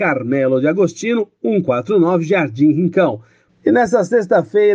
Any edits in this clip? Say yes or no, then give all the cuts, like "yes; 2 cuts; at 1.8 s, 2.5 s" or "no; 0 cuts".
yes; 1 cut; at 3.5 s